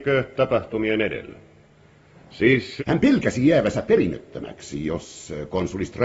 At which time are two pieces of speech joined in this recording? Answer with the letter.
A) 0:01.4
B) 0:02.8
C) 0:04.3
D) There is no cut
B